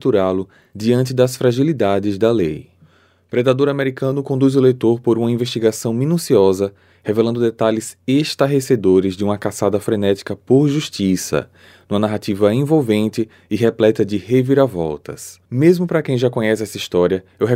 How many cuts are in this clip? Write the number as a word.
one